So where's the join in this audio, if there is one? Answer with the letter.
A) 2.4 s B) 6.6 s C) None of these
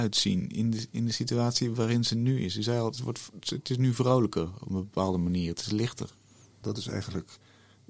B